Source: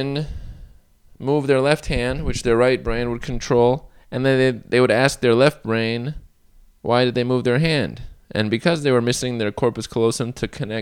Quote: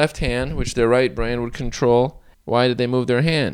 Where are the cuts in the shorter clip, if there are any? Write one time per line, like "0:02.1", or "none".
0:02.3